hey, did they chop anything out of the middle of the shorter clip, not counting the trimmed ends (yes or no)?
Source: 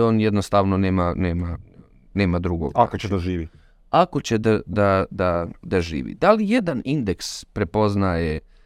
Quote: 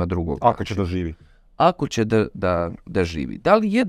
yes